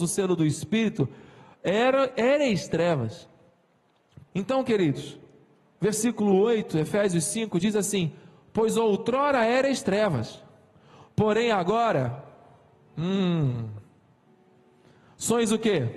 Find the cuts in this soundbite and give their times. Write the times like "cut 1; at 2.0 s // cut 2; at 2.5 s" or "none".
cut 1; at 4.3 s